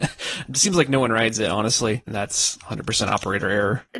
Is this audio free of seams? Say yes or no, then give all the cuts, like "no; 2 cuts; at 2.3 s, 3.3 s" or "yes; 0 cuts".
no; 1 cut; at 2.1 s